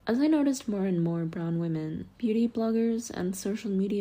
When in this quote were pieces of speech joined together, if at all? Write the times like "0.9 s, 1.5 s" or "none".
2.1 s